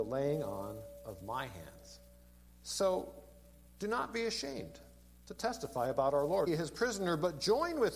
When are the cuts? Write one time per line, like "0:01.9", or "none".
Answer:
0:02.5
0:06.5

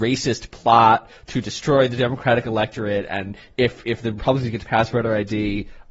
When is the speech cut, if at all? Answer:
none

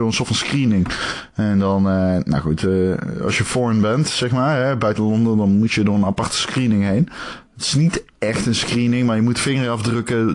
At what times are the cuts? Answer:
0:01.3

